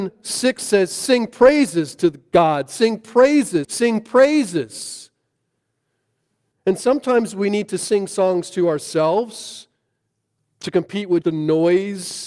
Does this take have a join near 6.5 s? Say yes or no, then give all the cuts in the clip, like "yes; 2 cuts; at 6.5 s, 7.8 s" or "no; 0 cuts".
yes; 3 cuts; at 3.6 s, 6.5 s, 11.2 s